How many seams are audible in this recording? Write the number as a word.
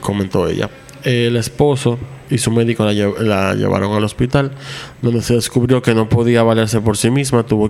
zero